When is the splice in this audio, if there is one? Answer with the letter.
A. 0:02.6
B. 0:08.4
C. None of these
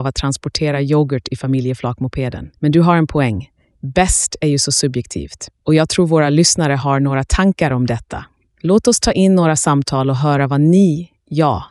A